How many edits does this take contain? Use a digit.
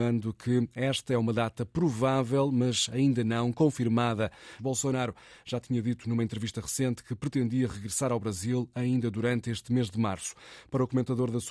1